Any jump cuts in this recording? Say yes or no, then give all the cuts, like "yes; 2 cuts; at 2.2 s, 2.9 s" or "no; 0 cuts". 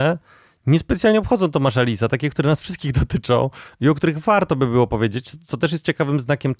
no; 0 cuts